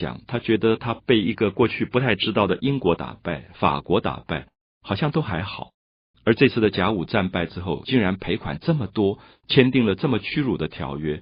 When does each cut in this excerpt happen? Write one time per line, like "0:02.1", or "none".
0:06.1